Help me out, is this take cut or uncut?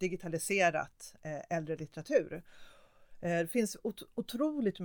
uncut